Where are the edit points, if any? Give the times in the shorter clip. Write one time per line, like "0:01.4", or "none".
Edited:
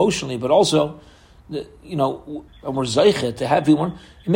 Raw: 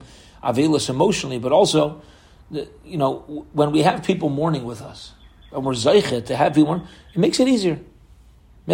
0:02.5